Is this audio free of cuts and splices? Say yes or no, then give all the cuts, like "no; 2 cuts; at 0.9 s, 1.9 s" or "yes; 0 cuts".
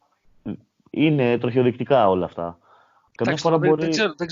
no; 1 cut; at 3.1 s